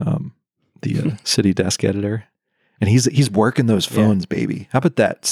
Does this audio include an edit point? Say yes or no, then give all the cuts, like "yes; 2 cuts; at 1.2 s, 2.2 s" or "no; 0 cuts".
no; 0 cuts